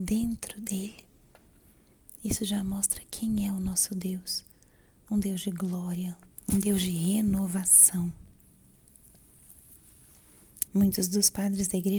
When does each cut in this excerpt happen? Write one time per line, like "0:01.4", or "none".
0:06.3
0:10.7